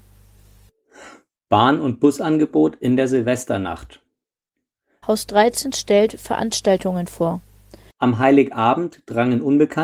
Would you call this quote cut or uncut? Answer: cut